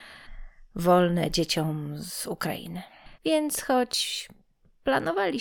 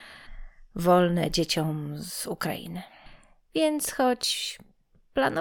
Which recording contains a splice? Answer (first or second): first